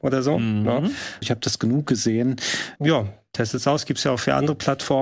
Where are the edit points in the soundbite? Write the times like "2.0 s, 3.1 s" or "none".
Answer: 1.2 s, 2.8 s